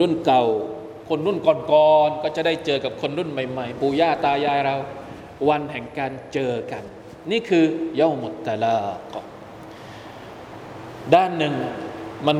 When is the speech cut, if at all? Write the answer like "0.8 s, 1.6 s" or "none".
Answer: none